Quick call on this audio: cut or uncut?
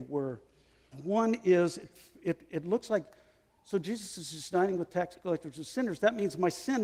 cut